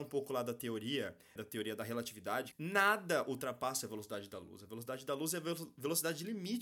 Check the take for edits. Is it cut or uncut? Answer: cut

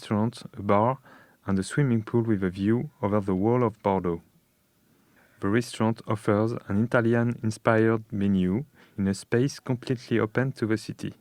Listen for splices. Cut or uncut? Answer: uncut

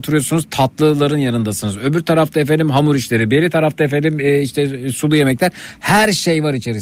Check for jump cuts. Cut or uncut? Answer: uncut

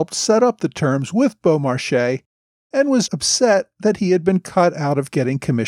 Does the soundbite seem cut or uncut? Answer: cut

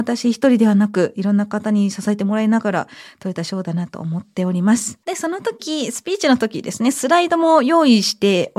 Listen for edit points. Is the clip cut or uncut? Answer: cut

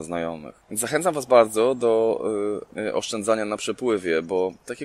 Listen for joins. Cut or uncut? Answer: cut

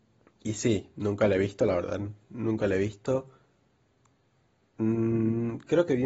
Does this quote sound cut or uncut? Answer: uncut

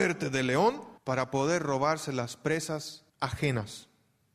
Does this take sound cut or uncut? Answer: cut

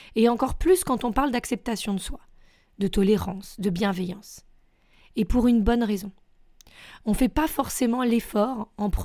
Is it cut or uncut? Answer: uncut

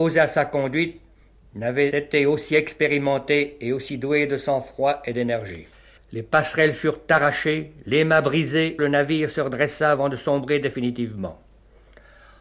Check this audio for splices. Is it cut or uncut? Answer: cut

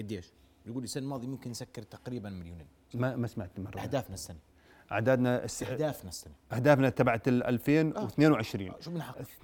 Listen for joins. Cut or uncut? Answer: uncut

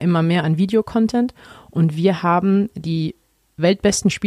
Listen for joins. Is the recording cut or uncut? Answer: uncut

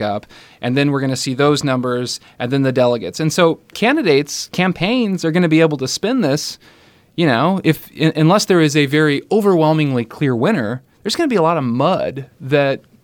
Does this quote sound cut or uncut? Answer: uncut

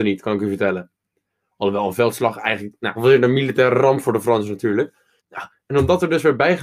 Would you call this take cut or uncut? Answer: cut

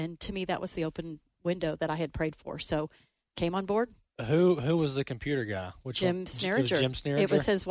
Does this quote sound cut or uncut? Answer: uncut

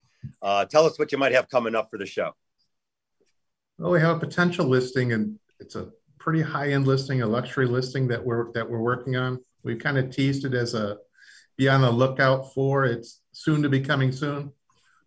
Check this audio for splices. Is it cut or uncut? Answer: uncut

